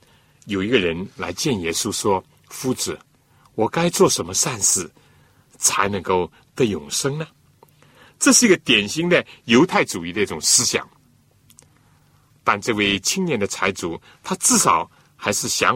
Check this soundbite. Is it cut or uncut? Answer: uncut